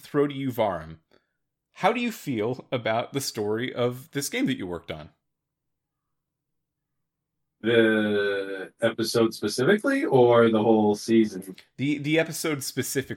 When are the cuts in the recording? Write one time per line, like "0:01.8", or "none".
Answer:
none